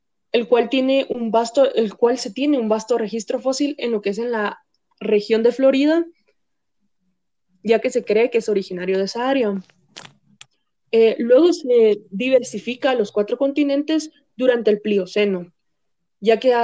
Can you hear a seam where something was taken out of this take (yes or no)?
no